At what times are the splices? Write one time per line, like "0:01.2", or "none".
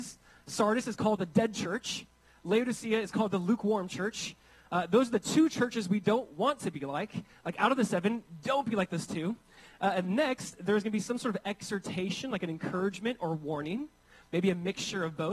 none